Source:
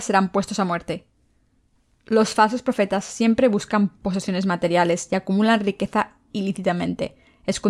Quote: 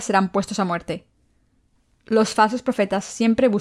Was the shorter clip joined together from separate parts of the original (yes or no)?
no